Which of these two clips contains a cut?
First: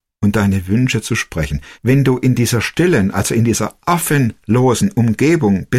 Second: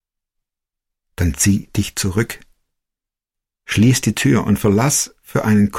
first; 1 cut; at 1.7 s

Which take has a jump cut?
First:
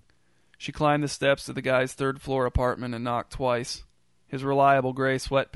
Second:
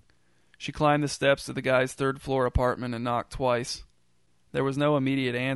first; 1 cut; at 4.2 s

